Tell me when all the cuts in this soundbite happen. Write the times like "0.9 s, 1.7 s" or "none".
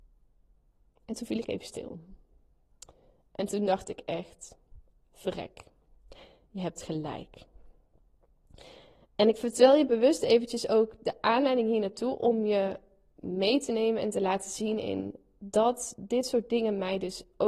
none